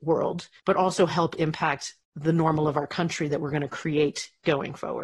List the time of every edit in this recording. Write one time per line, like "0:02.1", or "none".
none